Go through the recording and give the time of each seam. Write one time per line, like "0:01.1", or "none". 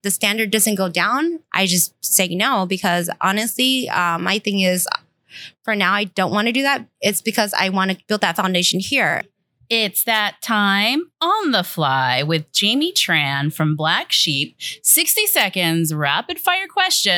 0:01.5